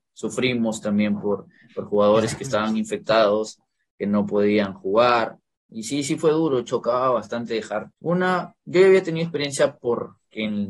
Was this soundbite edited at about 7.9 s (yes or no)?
yes